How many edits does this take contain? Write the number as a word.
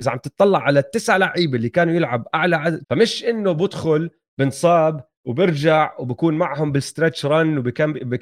one